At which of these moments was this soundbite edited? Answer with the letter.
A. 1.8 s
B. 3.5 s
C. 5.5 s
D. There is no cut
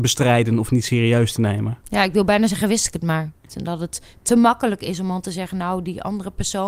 B